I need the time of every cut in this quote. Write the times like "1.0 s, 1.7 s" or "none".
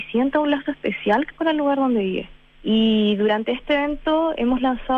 2.5 s